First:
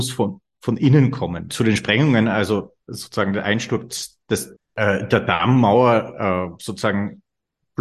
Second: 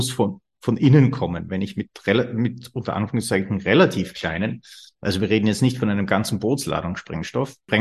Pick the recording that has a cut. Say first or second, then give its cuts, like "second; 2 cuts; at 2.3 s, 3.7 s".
first; 3 cuts; at 1.5 s, 2.8 s, 4.6 s